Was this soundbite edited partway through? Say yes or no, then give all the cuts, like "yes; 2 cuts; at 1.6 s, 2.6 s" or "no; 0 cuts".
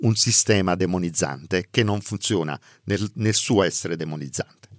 no; 0 cuts